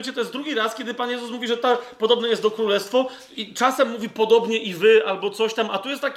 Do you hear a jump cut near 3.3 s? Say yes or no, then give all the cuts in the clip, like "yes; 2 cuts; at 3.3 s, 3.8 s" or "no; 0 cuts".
yes; 1 cut; at 3.3 s